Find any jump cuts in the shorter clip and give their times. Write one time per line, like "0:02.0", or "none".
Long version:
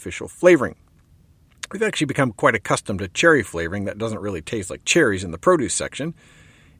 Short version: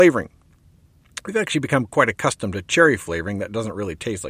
none